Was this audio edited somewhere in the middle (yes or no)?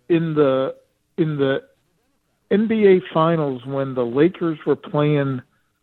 no